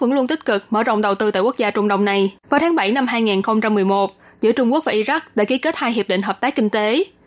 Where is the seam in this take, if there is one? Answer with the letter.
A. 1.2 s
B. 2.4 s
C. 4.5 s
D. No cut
B